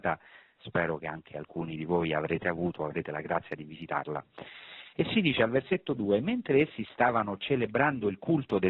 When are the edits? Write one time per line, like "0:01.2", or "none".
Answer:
0:04.9